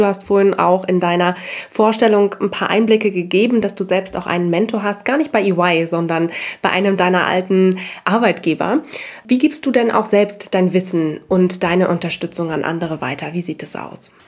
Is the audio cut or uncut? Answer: uncut